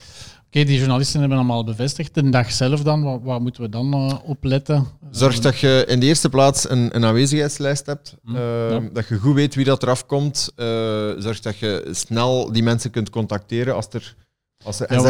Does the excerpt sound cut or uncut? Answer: uncut